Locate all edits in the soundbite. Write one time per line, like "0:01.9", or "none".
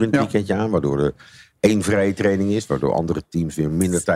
none